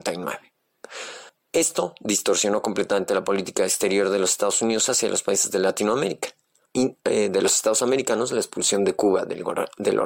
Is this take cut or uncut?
cut